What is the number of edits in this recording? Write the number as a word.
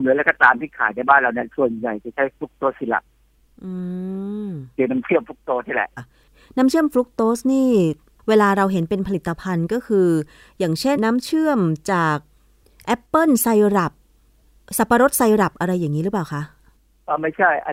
two